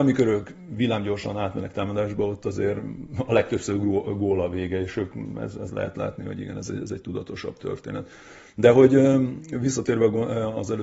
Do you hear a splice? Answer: no; 0 cuts

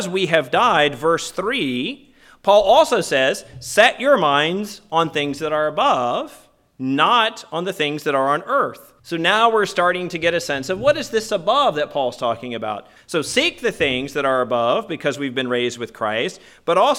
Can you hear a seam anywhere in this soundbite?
yes; 2 cuts; at 9.0 s, 13.0 s

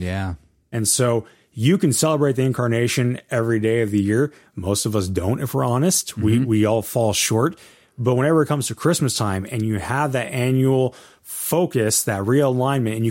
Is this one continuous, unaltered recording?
yes; 0 cuts

